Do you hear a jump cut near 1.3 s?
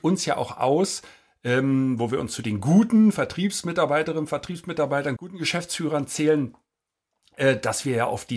no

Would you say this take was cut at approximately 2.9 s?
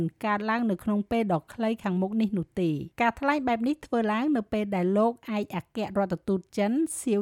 yes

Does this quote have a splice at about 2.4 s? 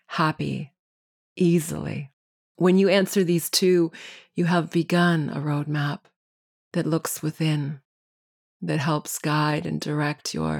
yes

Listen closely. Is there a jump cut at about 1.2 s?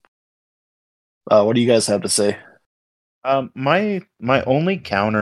no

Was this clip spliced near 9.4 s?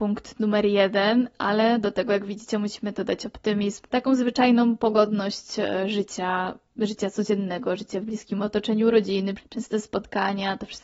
yes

